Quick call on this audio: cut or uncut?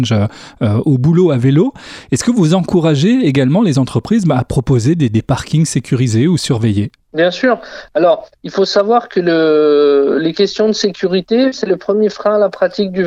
uncut